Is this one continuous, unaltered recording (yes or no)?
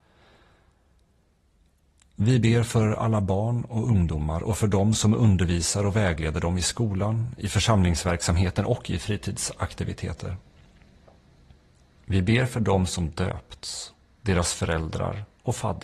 yes